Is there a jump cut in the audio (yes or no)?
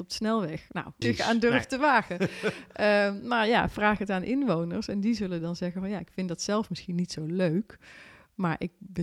yes